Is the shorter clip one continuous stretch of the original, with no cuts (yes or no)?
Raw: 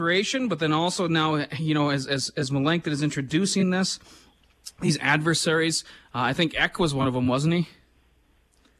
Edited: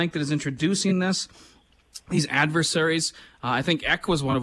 yes